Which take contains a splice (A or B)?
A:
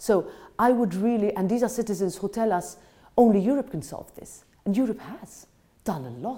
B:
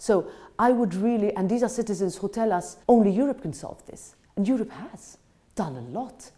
B